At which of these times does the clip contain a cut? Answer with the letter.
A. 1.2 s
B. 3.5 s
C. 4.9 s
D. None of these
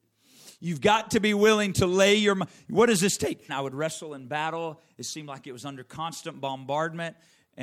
B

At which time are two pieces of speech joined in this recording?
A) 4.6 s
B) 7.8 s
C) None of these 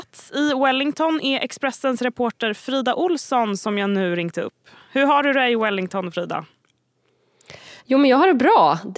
C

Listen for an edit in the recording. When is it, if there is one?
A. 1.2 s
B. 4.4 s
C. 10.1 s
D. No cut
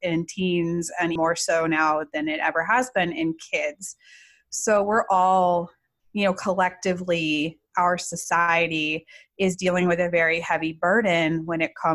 A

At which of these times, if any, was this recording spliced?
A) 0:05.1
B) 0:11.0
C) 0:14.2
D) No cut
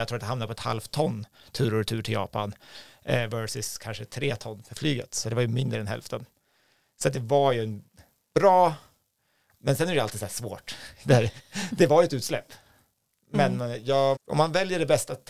C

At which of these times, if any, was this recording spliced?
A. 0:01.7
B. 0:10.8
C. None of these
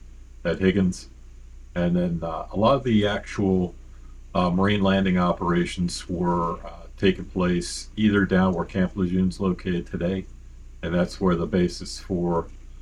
A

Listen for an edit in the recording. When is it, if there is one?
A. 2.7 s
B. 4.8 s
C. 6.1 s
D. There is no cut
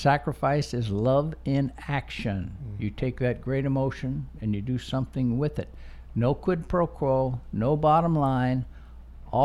D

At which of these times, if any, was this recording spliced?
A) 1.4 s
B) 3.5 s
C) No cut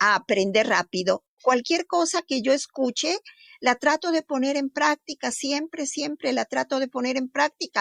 A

